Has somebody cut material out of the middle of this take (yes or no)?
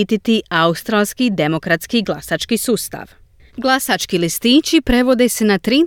yes